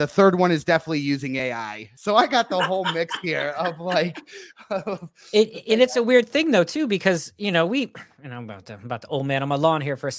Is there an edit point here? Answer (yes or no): no